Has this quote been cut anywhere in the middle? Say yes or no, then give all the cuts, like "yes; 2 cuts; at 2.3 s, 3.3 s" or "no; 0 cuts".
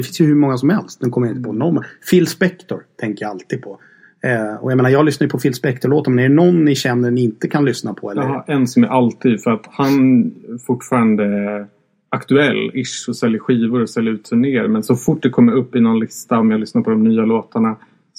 no; 0 cuts